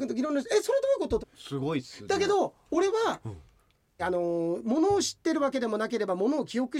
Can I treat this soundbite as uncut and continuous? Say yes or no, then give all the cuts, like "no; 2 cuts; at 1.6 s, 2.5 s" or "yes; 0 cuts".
no; 2 cuts; at 1.2 s, 4.0 s